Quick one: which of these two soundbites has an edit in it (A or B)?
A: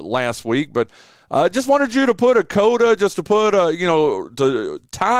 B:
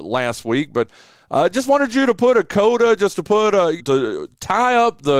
B